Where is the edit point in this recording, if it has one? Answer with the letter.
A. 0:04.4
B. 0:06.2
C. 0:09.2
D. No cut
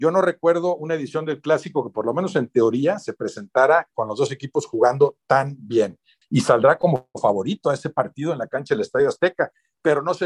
B